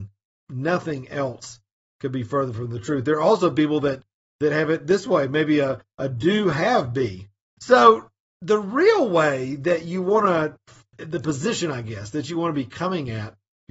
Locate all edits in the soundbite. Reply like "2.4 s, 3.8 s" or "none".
7.6 s, 10.9 s